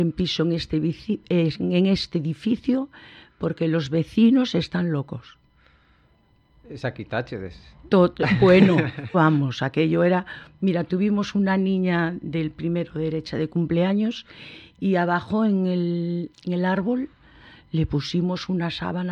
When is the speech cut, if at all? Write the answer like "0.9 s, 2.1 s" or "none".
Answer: 9.1 s, 16.3 s